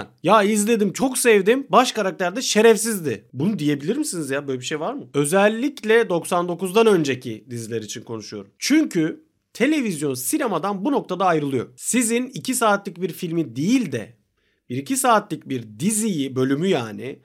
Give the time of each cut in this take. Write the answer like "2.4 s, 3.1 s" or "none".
none